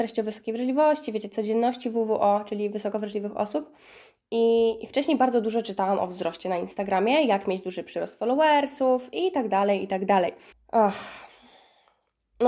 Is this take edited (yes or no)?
yes